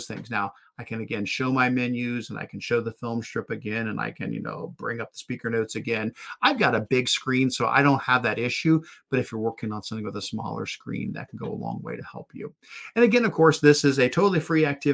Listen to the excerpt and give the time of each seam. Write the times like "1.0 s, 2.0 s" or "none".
none